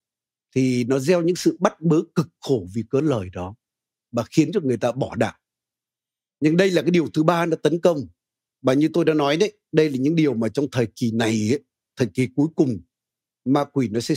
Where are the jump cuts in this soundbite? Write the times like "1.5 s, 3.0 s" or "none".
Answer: none

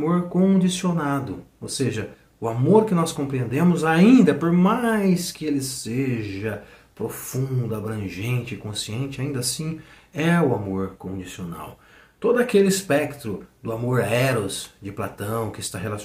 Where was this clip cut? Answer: none

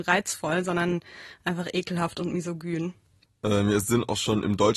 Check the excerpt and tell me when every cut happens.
3.3 s

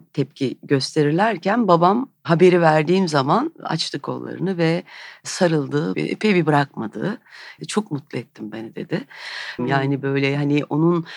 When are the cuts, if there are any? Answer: 5.9 s, 7.6 s, 9.6 s

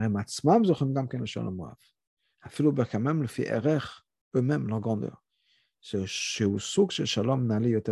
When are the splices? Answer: 2.4 s

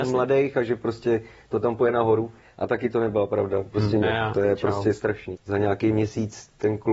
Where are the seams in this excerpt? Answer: 4.0 s, 5.3 s

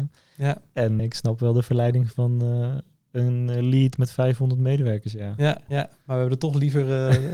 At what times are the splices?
1.0 s, 5.7 s

